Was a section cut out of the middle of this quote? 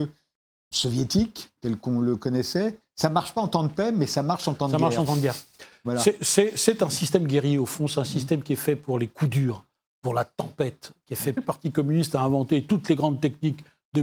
yes; 1 cut; at 11.4 s

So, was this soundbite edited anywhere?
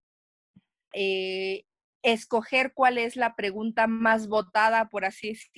yes; 1 cut; at 0.9 s

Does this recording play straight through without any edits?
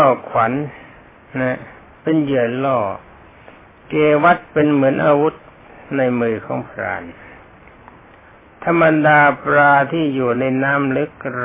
yes; 0 cuts

